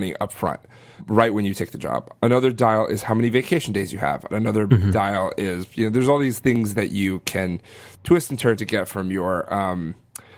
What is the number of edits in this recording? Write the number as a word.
one